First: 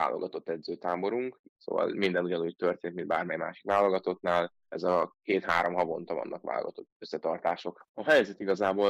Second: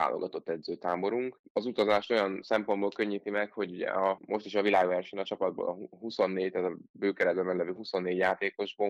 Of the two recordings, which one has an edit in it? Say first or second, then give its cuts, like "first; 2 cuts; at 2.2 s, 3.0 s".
first; 2 cuts; at 1.5 s, 7.9 s